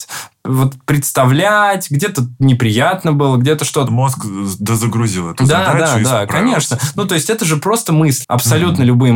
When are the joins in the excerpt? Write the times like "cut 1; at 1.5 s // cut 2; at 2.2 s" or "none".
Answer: cut 1; at 3.9 s // cut 2; at 8.2 s